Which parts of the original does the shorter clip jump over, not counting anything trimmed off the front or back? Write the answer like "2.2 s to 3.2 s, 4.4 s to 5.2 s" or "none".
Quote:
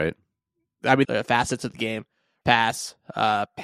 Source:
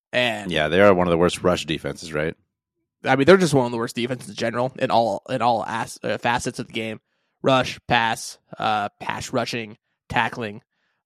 3.2 s to 6.0 s, 7.4 s to 7.8 s